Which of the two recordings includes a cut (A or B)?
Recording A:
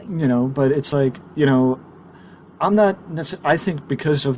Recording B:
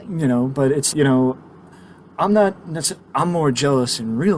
B